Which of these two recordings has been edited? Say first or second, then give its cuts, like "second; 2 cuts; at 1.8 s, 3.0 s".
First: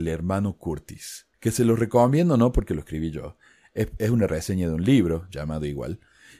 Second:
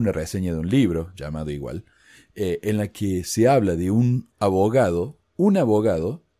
first; 1 cut; at 1.3 s